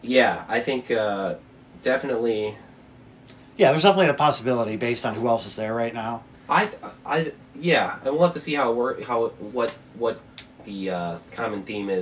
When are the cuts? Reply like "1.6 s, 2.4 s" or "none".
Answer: 6.3 s